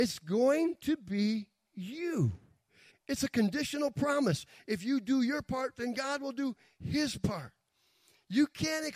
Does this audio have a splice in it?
yes; 1 cut; at 2.9 s

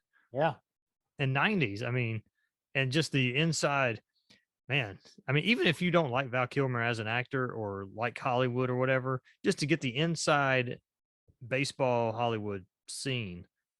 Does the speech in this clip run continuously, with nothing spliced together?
yes; 0 cuts

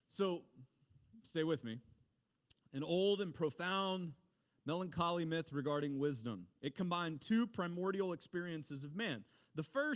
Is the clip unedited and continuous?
yes; 0 cuts

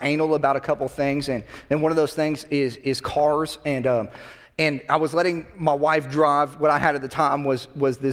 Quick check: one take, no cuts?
yes; 0 cuts

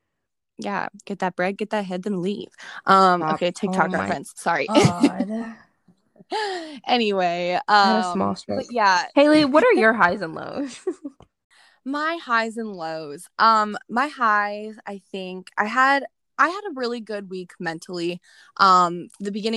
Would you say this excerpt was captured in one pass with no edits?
yes; 0 cuts

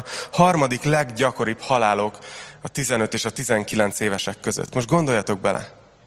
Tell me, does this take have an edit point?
no; 0 cuts

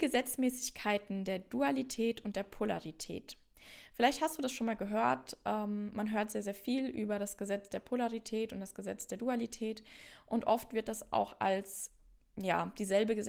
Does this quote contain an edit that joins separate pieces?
no; 0 cuts

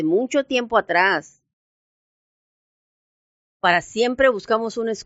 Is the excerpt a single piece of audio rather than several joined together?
yes; 0 cuts

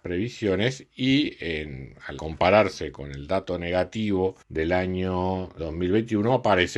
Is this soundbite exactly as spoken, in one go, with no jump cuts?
no; 3 cuts; at 2.2 s, 4.4 s, 5.6 s

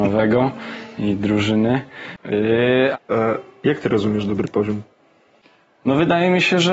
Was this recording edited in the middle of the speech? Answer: yes; 1 cut; at 2.9 s

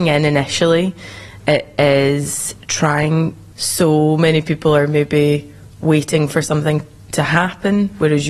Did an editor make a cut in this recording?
yes; 1 cut; at 3.5 s

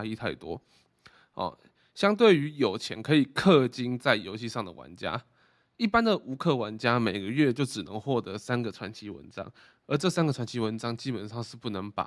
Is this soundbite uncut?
yes; 0 cuts

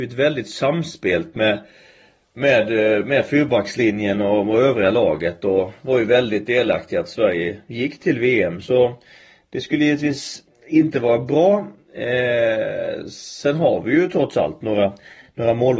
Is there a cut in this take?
no; 0 cuts

